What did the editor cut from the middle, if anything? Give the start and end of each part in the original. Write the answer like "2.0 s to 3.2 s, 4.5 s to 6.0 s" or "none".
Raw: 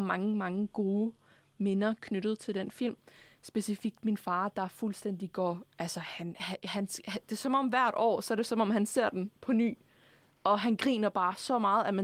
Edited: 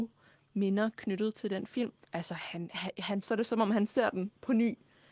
3.1 s to 5.7 s, 6.9 s to 8.2 s